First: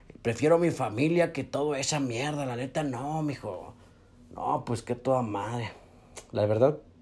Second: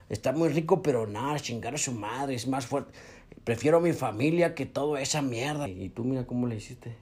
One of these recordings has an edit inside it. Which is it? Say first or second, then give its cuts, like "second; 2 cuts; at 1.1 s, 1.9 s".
second; 1 cut; at 5.7 s